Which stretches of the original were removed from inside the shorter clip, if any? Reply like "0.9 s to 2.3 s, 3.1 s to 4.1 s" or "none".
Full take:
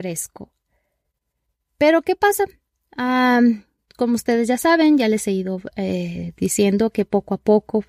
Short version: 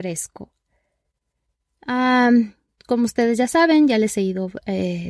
1.7 s to 2.8 s